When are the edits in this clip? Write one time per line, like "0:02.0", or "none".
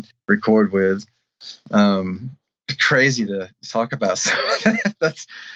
none